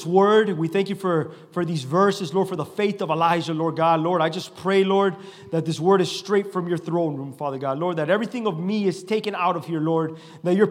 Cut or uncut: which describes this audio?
uncut